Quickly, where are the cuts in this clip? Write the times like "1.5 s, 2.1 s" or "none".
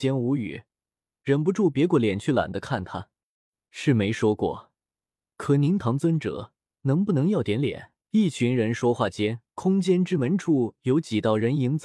5.8 s, 8.0 s, 9.5 s